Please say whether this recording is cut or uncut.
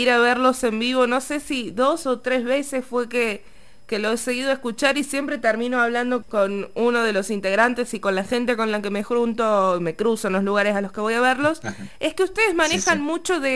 cut